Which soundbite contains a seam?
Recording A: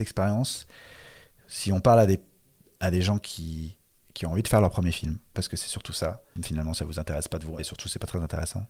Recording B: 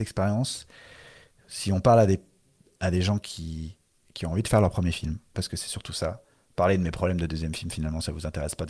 A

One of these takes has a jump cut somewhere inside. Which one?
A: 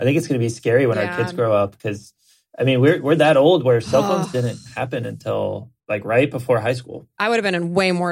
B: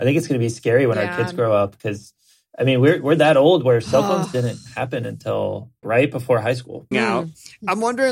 B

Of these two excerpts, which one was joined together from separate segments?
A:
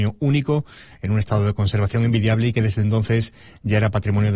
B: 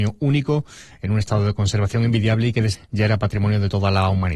B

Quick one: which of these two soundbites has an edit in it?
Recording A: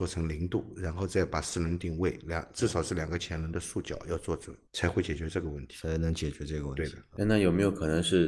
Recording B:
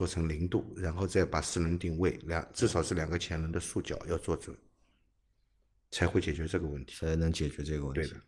A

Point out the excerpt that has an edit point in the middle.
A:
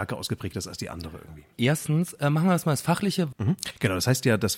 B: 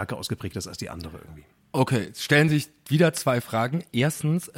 A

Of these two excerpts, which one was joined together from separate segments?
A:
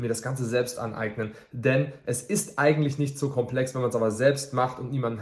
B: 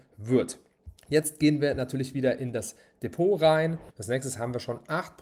B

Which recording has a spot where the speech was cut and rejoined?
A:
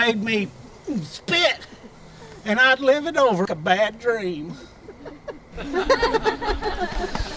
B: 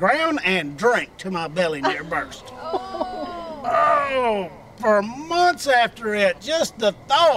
A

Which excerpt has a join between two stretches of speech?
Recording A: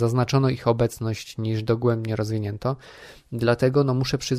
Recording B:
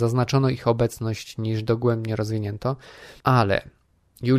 B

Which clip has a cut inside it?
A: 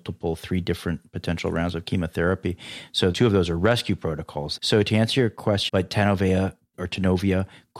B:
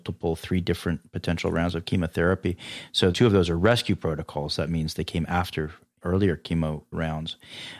A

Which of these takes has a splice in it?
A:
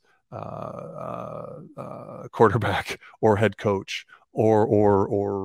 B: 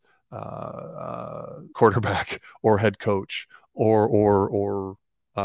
B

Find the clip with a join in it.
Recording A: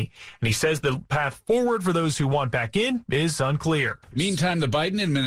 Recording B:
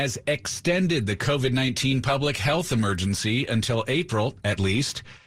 A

